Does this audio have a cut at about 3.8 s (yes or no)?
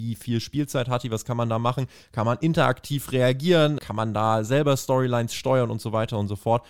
yes